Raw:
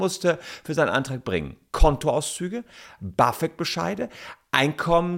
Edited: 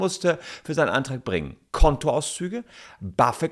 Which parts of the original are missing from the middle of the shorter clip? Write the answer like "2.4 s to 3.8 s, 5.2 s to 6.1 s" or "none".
none